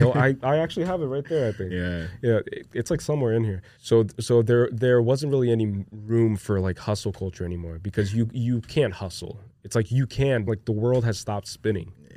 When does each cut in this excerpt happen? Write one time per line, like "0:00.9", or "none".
0:03.8
0:10.5